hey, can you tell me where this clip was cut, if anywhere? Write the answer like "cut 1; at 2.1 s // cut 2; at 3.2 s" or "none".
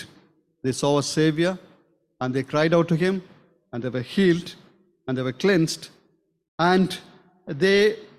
cut 1; at 6.5 s